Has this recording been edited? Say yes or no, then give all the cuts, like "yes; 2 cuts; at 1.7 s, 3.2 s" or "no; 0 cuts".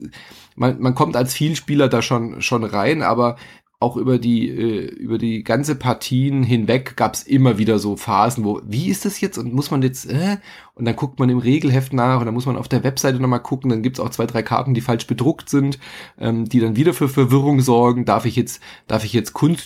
no; 0 cuts